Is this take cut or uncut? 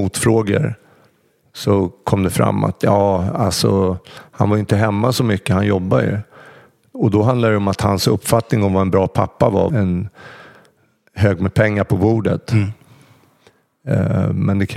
cut